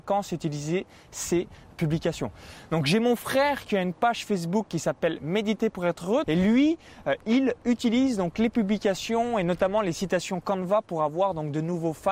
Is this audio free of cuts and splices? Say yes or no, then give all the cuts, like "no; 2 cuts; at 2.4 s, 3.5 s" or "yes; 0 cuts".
no; 1 cut; at 6.2 s